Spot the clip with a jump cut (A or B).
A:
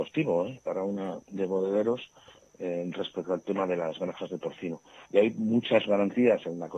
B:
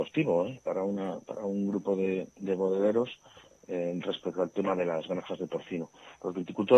A